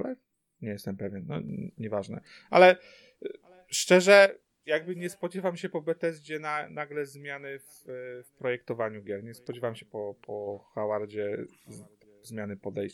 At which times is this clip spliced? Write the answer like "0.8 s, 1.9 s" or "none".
none